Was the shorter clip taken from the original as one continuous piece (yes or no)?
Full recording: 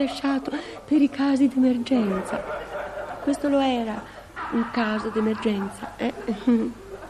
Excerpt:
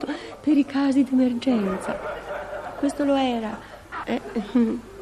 no